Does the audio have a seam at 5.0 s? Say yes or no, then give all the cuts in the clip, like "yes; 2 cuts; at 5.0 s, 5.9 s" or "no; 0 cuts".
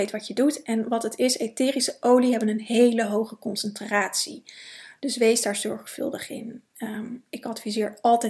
yes; 1 cut; at 5.0 s